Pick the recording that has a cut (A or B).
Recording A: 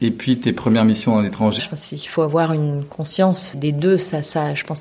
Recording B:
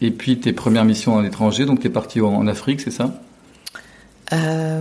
A